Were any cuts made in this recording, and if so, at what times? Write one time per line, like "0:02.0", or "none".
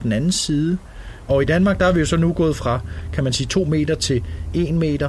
0:01.3